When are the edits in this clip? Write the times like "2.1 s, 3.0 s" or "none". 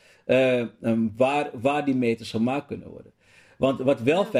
none